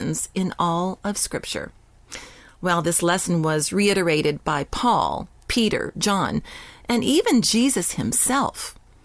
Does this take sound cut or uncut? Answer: uncut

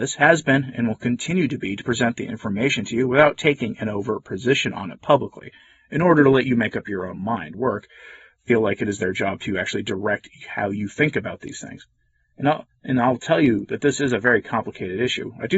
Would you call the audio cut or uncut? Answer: cut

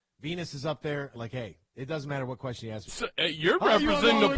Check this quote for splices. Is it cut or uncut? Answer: cut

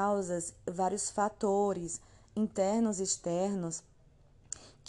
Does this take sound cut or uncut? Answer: uncut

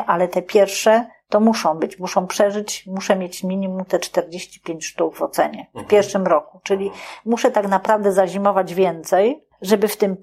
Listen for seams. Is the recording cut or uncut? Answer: uncut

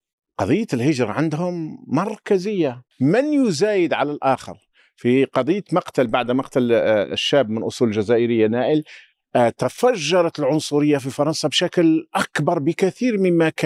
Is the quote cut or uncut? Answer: cut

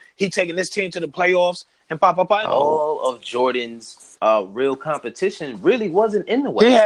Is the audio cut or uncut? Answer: cut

